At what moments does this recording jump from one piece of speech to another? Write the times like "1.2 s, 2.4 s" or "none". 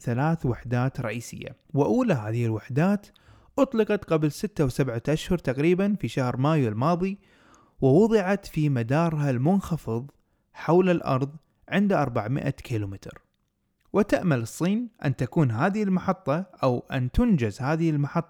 1.6 s